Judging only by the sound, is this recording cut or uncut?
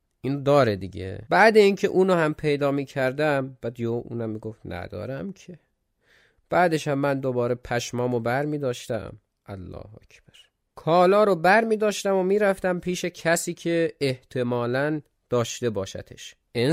uncut